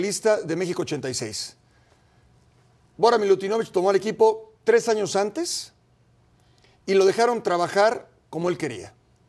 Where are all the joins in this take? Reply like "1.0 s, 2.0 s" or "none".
none